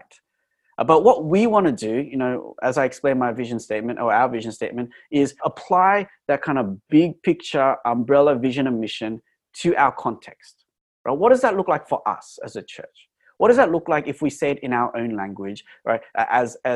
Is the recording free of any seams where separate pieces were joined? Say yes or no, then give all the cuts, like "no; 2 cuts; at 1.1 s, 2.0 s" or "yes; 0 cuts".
no; 1 cut; at 5.4 s